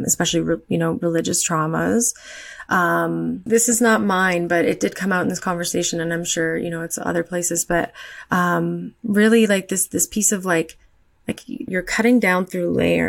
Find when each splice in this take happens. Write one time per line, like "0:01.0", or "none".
0:03.5
0:11.7